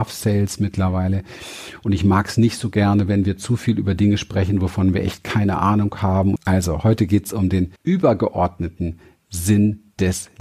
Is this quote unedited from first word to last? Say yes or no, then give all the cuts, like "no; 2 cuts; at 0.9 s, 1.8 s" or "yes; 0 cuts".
no; 2 cuts; at 6.4 s, 7.8 s